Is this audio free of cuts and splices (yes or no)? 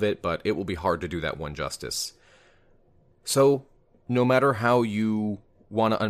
yes